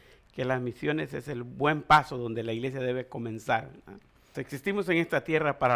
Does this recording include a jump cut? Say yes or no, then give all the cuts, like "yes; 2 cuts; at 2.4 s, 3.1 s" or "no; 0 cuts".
yes; 1 cut; at 4.3 s